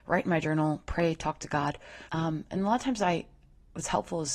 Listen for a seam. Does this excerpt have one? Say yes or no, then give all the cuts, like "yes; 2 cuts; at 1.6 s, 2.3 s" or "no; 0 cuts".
yes; 1 cut; at 2.1 s